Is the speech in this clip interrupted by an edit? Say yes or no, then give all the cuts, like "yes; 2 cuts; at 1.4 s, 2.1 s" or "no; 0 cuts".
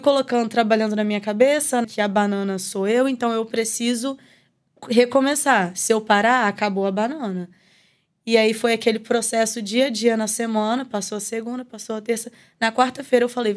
yes; 1 cut; at 1.8 s